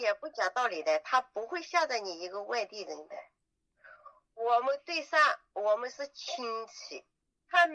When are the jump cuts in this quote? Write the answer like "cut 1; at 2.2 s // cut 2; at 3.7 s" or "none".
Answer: none